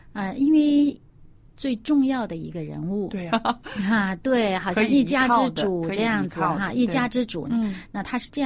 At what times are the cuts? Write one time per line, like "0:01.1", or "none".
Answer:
0:01.4
0:03.3
0:07.4